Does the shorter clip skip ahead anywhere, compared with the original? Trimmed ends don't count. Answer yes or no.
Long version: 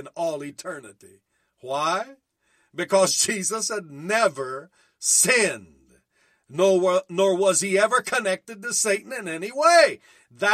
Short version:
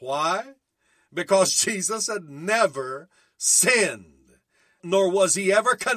yes